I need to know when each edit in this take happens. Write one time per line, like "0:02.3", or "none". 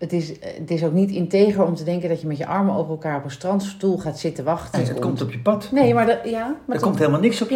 0:04.7